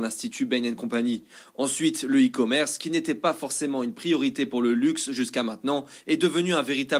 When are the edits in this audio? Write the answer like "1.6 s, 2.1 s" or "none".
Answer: none